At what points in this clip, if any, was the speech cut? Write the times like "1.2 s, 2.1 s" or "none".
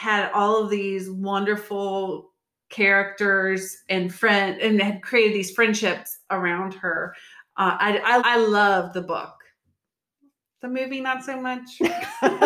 8.2 s